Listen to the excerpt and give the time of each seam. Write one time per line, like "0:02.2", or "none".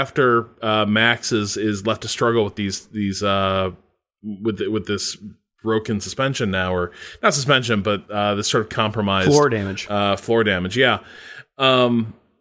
none